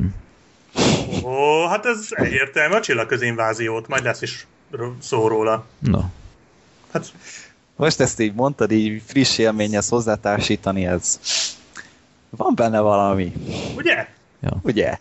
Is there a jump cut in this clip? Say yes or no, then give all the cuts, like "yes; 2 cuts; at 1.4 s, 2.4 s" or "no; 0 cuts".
no; 0 cuts